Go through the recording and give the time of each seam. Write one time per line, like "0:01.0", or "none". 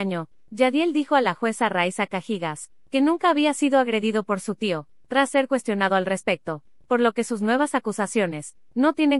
0:06.8